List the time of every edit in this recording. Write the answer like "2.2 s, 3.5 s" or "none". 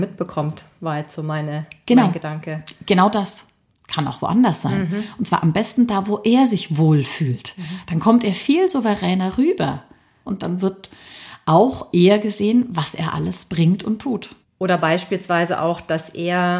3.7 s, 10.3 s